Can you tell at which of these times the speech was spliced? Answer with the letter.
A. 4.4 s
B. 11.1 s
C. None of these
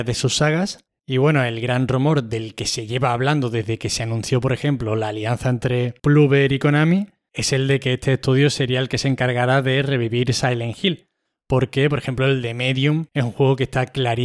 C